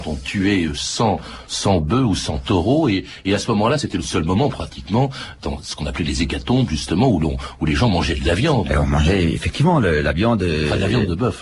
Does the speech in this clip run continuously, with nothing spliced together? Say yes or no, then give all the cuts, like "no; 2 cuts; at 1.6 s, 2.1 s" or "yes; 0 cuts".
yes; 0 cuts